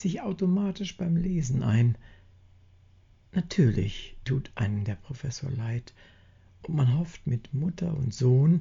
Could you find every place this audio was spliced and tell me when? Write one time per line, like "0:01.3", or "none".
none